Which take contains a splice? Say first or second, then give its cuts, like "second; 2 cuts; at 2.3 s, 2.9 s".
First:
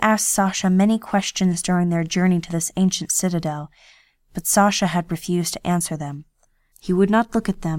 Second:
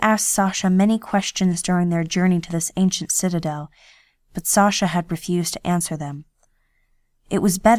first; 1 cut; at 6.7 s